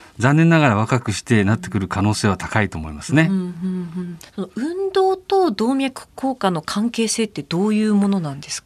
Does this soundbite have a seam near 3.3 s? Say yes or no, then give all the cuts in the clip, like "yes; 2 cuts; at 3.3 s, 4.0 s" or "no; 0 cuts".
no; 0 cuts